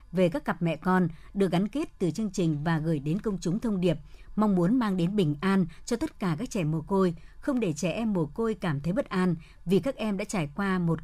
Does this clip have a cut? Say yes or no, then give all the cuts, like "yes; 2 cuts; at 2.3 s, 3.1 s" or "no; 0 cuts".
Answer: no; 0 cuts